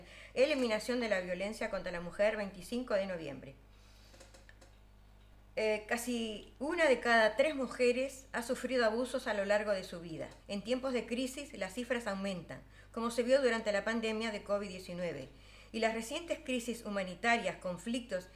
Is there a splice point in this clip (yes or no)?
yes